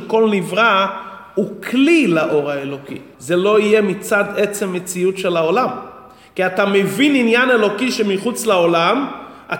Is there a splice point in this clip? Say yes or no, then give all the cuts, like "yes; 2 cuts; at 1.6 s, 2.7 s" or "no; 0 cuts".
yes; 1 cut; at 3.1 s